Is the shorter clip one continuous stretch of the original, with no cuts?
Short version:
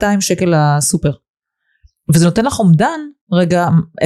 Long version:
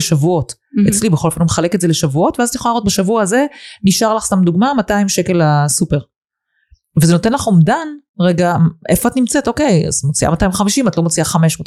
yes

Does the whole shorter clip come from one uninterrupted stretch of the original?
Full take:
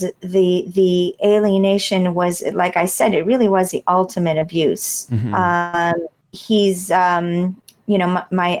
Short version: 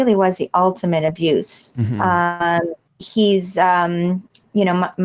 yes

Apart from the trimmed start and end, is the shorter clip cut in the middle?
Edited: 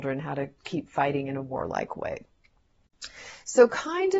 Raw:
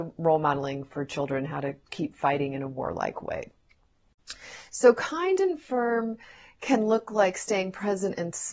no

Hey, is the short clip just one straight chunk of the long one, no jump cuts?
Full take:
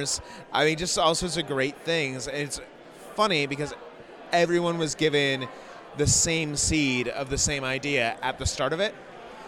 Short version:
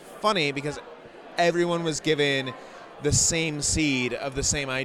yes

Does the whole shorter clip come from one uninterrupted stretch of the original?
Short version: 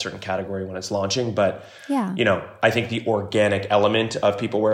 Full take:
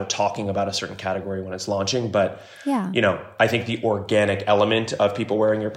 yes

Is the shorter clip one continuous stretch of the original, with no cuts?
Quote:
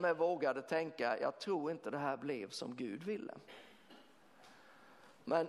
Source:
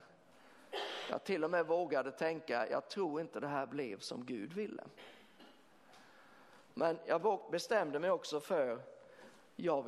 yes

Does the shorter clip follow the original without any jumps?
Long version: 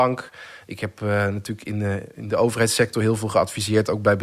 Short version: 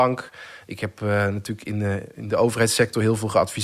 yes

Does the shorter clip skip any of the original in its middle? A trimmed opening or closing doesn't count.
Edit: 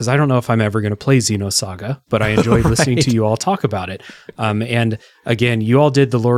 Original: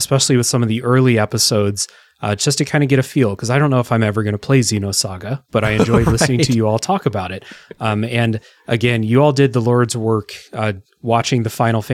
no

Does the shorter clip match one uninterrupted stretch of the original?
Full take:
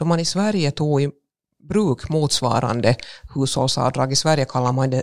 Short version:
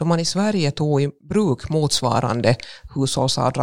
no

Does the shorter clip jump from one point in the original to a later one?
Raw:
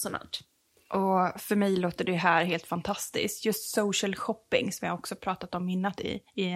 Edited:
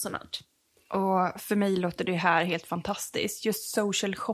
no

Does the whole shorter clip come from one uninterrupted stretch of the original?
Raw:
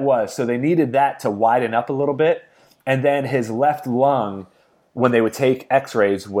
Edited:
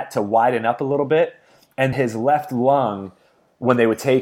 no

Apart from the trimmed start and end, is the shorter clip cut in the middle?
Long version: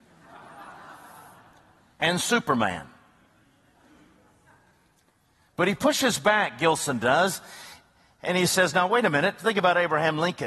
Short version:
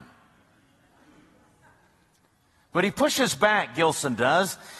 no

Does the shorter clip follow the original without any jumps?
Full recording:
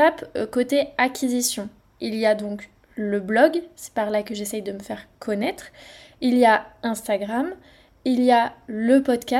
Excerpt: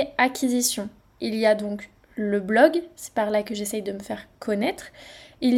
yes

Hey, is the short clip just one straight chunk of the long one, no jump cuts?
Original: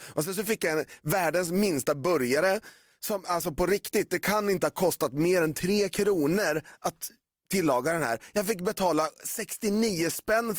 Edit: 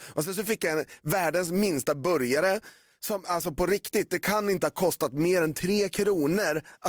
yes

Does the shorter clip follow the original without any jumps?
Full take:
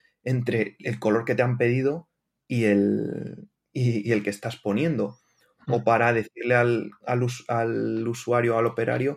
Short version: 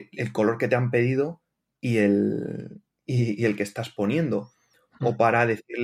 yes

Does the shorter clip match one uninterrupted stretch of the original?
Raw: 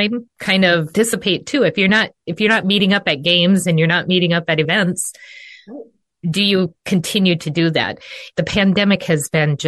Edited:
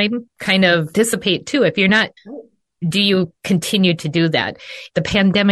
no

